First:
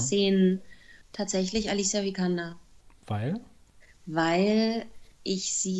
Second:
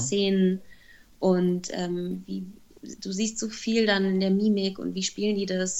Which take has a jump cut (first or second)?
first